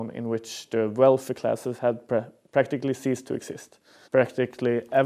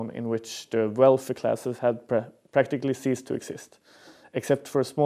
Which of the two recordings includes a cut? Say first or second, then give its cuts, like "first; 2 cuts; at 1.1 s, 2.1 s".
first; 1 cut; at 4.0 s